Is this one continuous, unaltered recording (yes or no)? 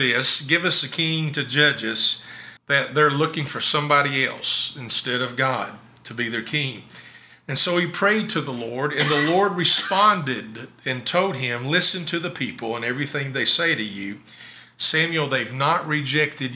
no